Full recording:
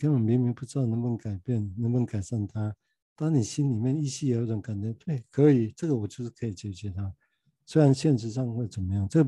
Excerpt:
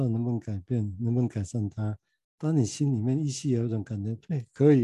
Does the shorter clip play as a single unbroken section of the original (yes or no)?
yes